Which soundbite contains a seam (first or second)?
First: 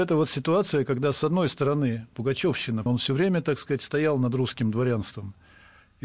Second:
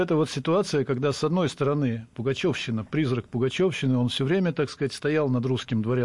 first